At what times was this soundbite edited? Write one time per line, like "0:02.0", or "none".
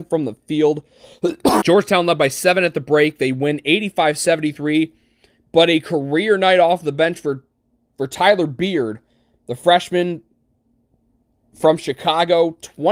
0:01.6